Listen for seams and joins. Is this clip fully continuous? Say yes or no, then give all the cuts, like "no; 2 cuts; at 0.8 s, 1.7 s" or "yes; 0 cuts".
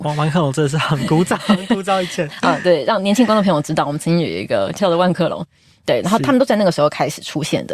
yes; 0 cuts